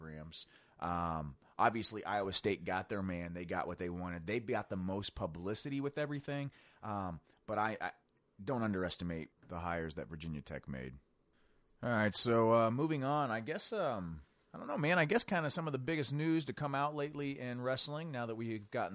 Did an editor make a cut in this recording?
no; 0 cuts

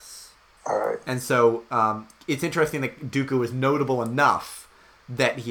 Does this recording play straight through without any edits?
no; 1 cut; at 1.0 s

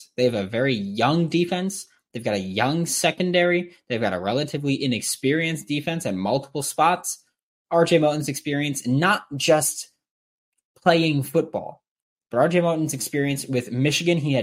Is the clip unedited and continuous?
yes; 0 cuts

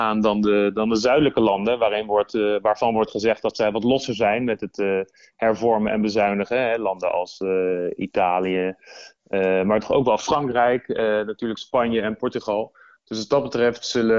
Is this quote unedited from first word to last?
yes; 0 cuts

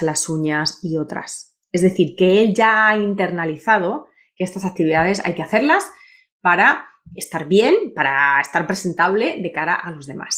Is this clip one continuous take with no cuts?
no; 1 cut; at 7.2 s

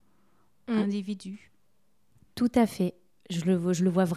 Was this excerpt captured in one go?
yes; 0 cuts

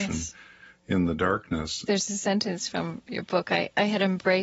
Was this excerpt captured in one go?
no; 1 cut; at 1.9 s

